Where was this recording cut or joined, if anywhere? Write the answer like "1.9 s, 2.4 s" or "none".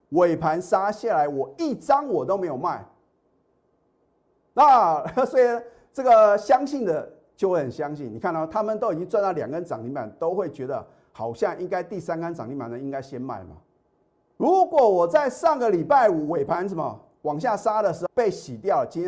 14.3 s, 18.1 s